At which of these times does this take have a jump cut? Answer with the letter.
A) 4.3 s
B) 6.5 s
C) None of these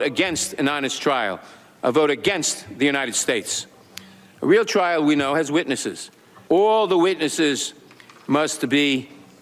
B